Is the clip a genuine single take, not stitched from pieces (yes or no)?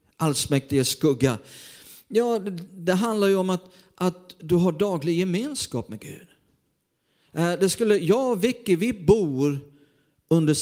yes